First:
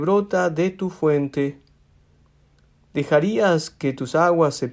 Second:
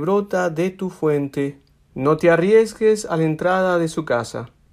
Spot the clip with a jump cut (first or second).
second